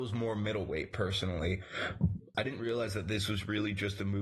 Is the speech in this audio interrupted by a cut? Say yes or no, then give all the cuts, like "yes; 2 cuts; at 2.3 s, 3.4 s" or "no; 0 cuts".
yes; 1 cut; at 2.3 s